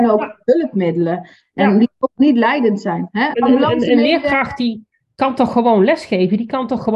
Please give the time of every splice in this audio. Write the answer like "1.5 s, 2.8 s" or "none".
3.3 s